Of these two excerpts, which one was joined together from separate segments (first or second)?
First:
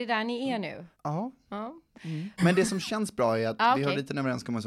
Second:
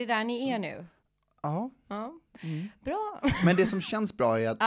first